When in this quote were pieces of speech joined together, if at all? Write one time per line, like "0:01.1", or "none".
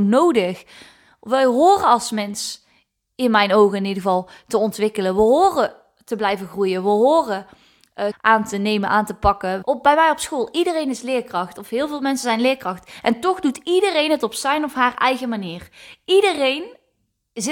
0:08.1
0:09.6